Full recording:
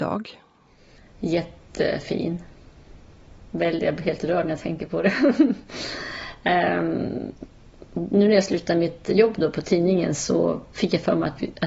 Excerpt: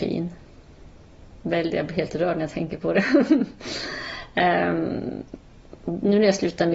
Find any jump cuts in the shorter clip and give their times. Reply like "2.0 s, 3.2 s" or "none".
none